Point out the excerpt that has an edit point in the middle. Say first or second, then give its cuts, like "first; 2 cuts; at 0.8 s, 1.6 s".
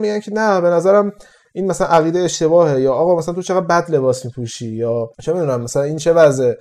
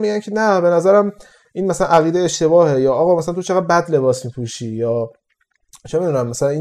first; 1 cut; at 5.1 s